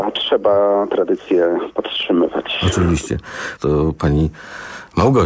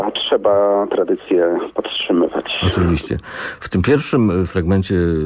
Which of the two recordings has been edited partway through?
first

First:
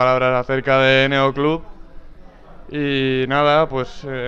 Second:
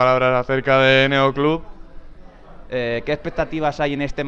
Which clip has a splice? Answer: second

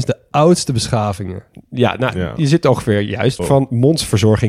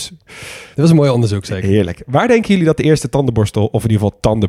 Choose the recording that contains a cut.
first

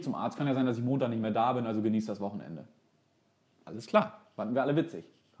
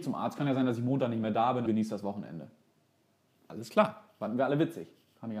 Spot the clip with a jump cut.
second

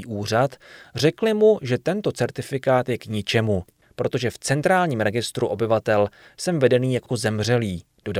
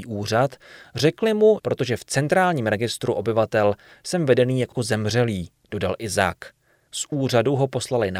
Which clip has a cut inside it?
second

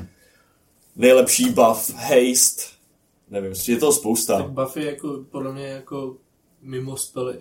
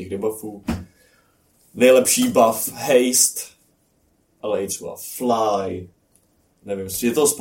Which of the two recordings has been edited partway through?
first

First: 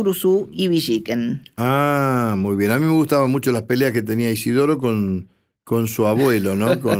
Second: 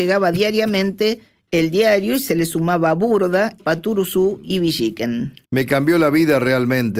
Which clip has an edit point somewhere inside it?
second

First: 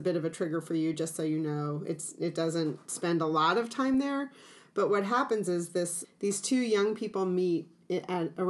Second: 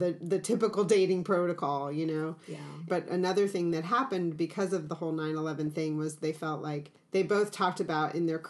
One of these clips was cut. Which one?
second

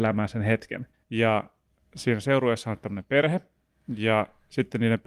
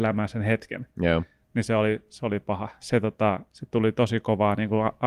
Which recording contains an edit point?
first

